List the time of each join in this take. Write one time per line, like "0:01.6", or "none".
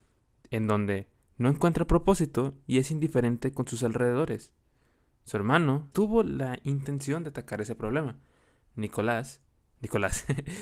0:05.9